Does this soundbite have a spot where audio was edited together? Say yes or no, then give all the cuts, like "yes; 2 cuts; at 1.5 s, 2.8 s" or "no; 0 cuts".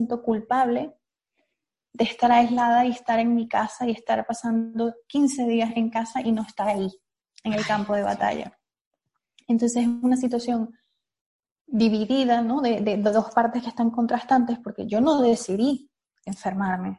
no; 0 cuts